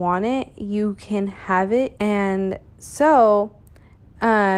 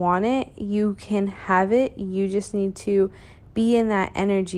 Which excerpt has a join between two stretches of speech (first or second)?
first